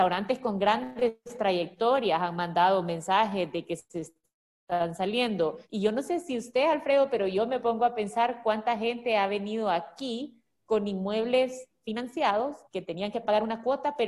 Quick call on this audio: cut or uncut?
cut